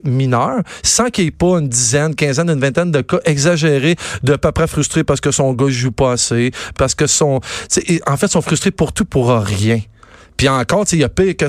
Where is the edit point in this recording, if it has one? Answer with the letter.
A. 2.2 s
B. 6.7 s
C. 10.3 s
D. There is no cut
B